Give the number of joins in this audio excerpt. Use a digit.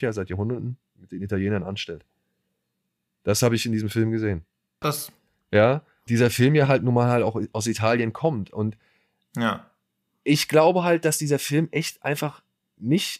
2